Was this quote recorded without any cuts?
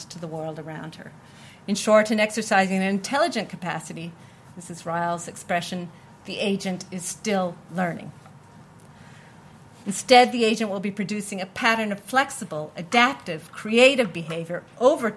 no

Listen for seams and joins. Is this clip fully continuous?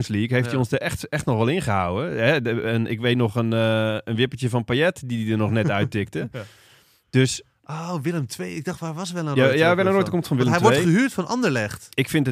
yes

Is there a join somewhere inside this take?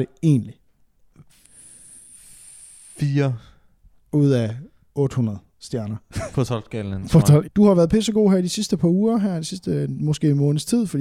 yes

